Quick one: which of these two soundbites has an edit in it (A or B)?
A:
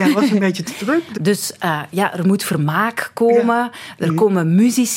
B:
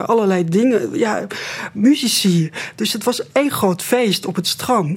A